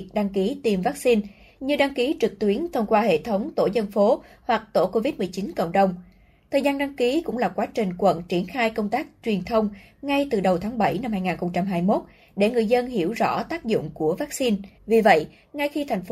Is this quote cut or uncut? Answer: cut